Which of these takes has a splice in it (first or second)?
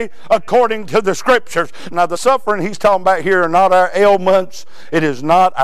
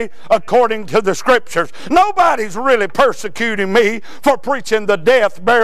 first